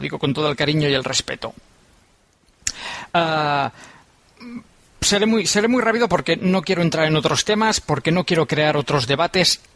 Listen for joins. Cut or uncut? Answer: uncut